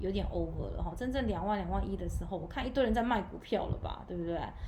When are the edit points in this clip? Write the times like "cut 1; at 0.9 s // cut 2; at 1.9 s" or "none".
none